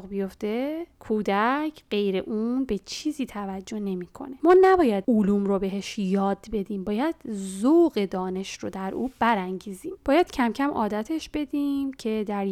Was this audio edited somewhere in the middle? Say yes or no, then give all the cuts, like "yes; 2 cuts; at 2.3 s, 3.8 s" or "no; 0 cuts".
no; 0 cuts